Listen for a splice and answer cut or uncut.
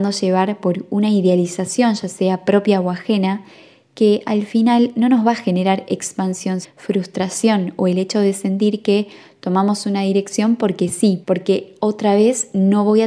cut